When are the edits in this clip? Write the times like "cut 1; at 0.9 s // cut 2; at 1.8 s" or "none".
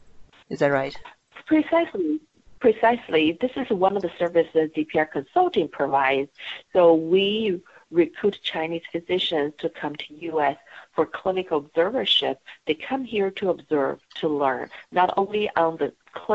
none